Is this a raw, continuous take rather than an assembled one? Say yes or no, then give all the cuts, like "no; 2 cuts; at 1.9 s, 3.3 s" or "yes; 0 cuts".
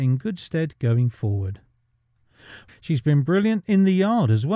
no; 1 cut; at 2.7 s